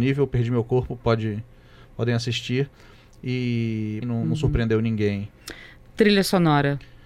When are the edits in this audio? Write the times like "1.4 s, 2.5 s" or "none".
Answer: 4.0 s